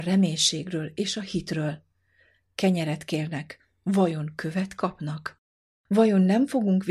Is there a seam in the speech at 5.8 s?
yes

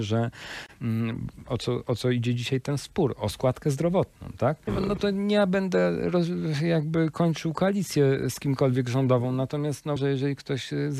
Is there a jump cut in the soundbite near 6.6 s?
no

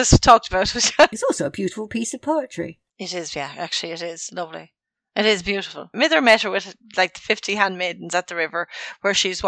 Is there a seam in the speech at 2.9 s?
no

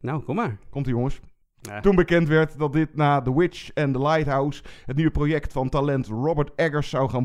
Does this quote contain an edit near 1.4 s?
yes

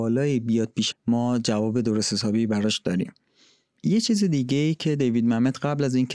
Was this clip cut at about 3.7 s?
no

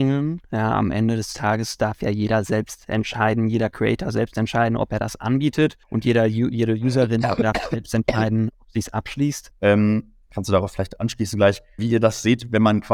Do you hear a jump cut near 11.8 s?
yes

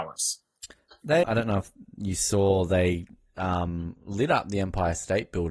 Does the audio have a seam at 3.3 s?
no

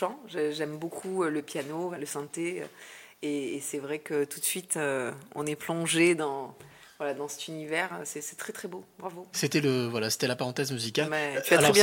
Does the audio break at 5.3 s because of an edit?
no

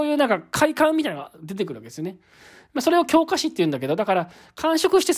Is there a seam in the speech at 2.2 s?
no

